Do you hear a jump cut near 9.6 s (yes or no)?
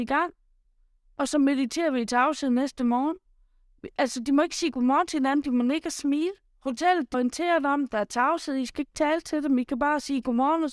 no